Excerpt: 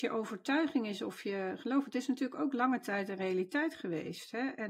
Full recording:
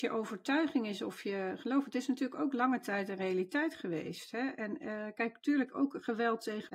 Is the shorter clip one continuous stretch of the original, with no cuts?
yes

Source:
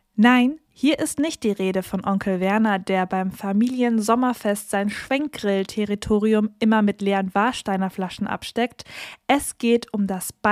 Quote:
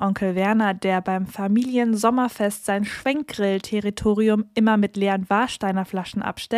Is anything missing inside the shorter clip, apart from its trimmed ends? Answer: no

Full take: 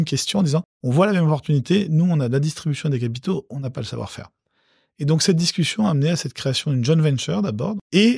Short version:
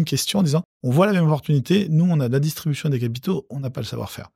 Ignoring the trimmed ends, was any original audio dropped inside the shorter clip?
no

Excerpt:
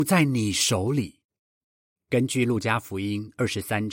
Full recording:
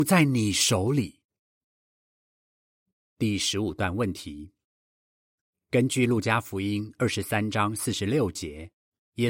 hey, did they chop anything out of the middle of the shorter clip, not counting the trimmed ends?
yes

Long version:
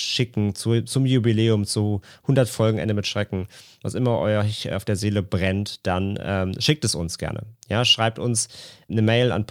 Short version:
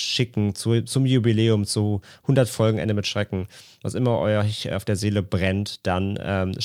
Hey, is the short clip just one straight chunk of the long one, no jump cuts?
yes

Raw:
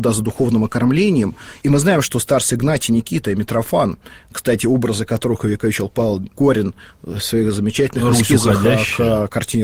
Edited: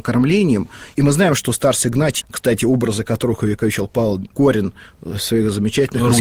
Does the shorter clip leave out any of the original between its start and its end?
yes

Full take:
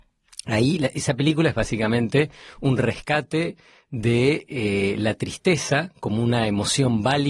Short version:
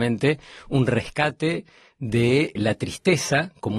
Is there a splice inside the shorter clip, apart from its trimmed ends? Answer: yes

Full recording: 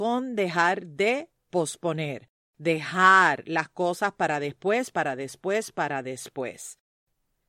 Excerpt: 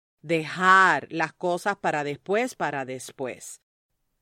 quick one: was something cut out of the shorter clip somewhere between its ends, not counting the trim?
yes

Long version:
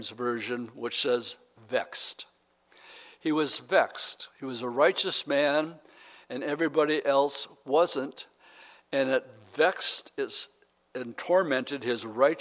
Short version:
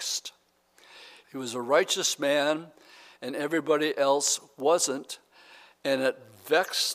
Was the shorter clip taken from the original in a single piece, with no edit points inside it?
no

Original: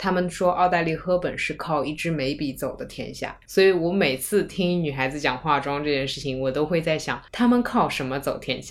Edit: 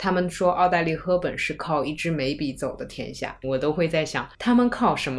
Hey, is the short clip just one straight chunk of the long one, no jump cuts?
no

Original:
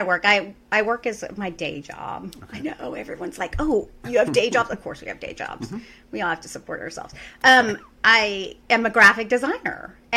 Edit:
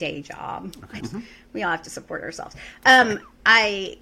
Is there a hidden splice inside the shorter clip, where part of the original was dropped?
yes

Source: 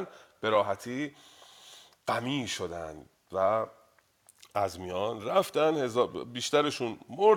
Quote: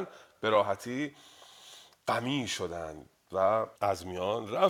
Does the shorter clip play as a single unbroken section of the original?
no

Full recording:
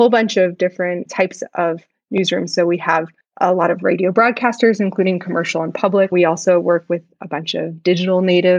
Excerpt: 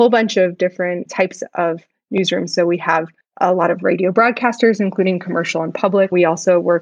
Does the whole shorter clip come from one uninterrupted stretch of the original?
yes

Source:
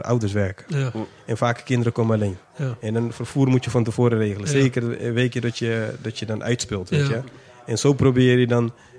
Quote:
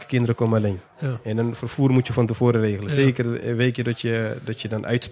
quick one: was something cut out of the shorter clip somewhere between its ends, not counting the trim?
no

